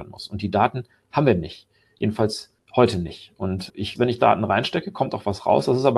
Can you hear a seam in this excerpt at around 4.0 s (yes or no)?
yes